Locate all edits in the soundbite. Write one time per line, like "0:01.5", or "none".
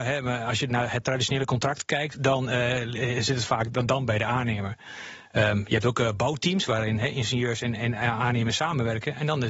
0:02.1